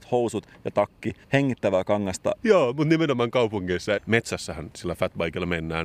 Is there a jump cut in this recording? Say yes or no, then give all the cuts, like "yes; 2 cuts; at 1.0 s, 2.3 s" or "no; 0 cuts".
yes; 3 cuts; at 1.2 s, 2.4 s, 4.0 s